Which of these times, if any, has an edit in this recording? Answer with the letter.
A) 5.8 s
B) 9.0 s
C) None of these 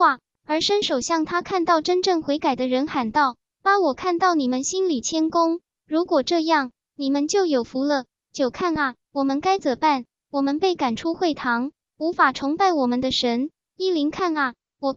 B